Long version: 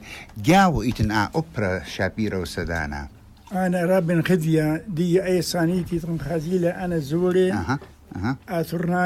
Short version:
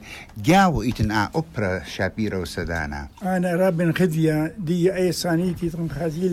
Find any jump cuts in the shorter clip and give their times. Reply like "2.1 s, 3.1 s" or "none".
3.1 s